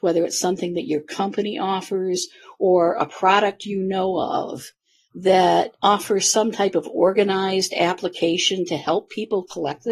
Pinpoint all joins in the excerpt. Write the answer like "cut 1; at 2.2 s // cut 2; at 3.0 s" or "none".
none